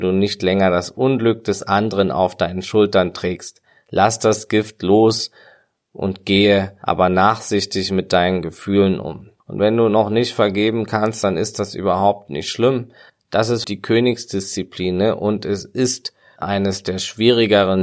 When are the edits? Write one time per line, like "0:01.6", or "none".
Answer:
0:09.4
0:13.6